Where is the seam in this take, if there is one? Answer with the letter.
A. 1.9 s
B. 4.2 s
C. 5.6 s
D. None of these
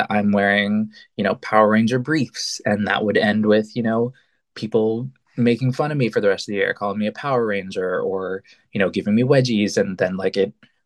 D